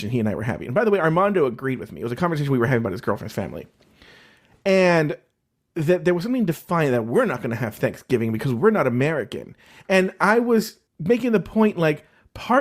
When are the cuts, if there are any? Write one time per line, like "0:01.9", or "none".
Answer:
0:10.9